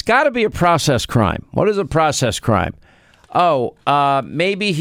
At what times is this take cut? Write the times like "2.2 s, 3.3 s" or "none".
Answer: none